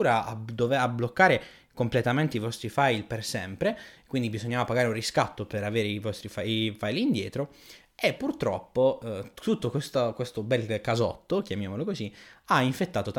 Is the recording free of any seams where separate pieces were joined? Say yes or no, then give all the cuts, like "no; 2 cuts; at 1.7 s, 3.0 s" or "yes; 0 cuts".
yes; 0 cuts